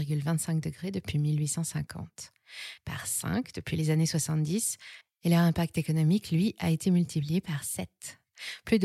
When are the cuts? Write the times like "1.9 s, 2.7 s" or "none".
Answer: 2.8 s